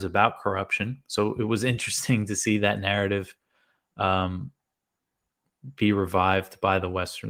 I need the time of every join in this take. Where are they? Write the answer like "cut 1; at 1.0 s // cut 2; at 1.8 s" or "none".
none